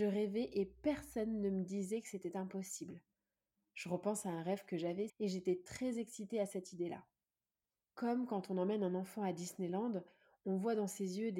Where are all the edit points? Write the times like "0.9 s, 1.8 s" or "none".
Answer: 5.1 s

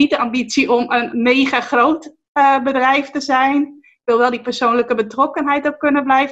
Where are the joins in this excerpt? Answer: none

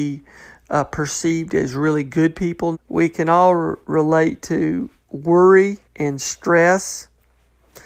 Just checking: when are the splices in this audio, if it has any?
2.7 s, 5.8 s

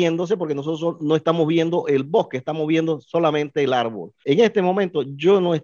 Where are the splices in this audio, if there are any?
4.2 s

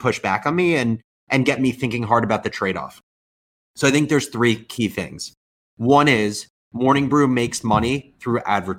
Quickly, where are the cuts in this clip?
none

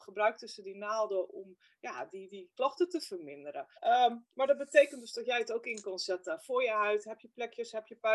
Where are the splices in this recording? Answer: 3.7 s

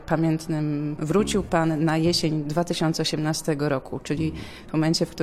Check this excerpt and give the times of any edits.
1.0 s

